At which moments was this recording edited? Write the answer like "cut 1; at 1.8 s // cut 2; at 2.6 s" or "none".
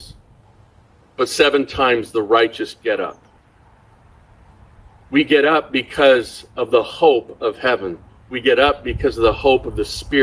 none

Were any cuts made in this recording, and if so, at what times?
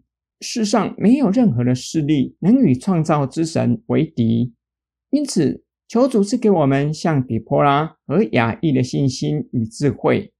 cut 1; at 5.7 s

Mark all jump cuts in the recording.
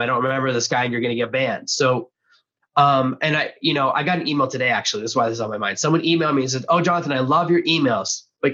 none

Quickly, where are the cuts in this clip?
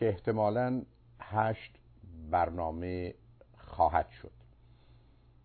none

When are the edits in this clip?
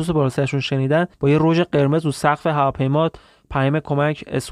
cut 1; at 1.1 s

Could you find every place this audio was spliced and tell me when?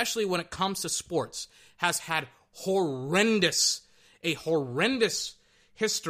none

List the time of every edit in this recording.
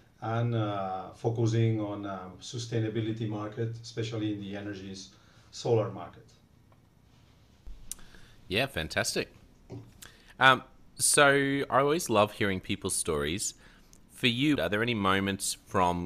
cut 1; at 14.6 s

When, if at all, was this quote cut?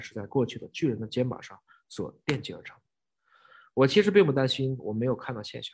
none

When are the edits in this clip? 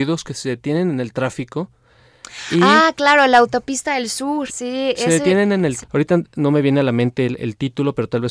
cut 1; at 4.5 s // cut 2; at 5.8 s

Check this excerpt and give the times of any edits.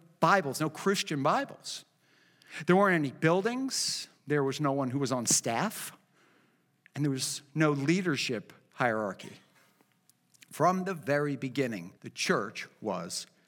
cut 1; at 12.0 s

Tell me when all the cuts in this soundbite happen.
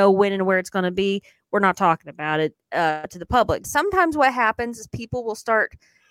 cut 1; at 3.6 s

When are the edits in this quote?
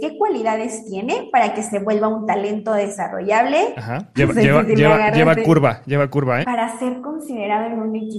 cut 1; at 4.2 s // cut 2; at 6.4 s

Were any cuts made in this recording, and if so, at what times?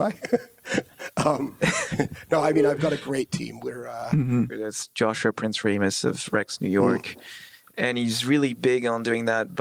cut 1; at 4.5 s

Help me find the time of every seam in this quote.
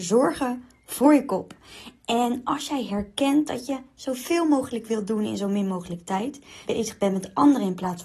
cut 1; at 6.6 s

